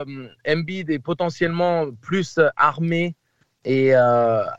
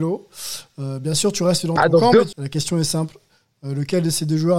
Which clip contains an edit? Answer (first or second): second